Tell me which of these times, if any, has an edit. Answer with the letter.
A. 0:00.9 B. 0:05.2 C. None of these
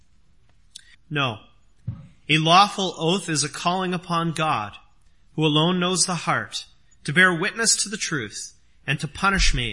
A